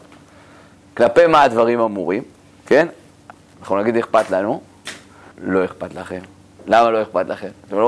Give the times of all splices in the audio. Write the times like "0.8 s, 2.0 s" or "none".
3.5 s, 5.3 s